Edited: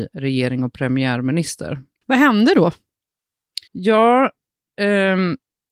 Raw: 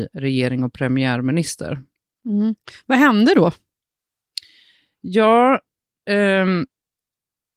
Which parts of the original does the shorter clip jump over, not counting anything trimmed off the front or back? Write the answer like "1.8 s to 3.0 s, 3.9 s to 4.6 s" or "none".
2.0 s to 2.8 s, 4.5 s to 5.0 s